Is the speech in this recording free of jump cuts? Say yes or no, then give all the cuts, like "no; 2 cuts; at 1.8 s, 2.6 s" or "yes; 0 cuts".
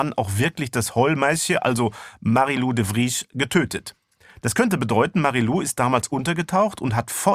yes; 0 cuts